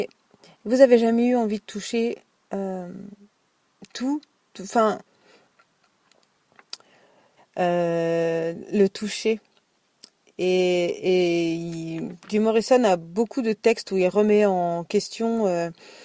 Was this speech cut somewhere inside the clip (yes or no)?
yes